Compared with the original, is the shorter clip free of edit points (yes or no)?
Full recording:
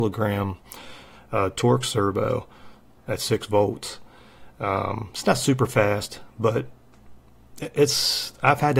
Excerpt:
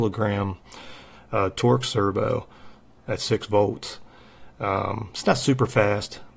yes